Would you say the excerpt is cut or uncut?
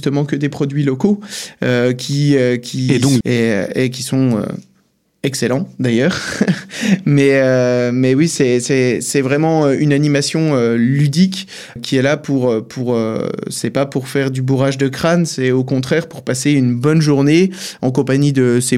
cut